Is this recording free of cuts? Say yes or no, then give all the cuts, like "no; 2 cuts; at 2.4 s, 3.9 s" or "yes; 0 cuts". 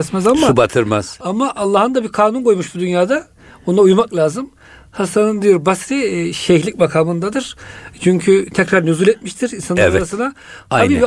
yes; 0 cuts